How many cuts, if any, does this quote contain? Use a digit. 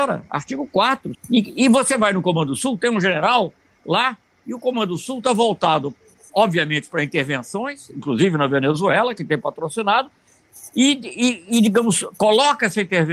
1